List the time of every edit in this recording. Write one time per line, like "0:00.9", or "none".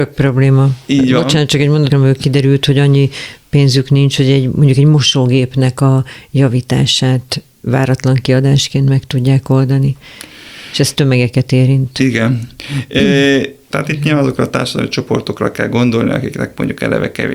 0:01.9
0:13.7